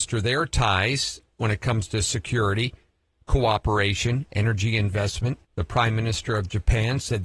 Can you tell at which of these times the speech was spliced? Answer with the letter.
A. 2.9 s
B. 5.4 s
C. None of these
B